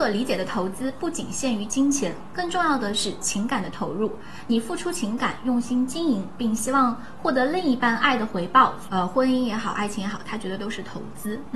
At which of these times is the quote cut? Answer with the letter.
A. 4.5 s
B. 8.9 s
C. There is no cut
B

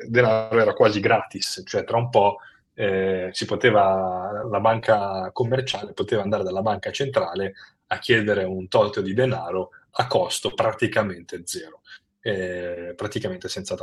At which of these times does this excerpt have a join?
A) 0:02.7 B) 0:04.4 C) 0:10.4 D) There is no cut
B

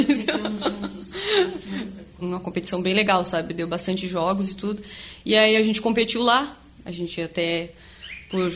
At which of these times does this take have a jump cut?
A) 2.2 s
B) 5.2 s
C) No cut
A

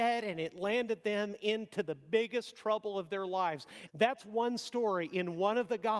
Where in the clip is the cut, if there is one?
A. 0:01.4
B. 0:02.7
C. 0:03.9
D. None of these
C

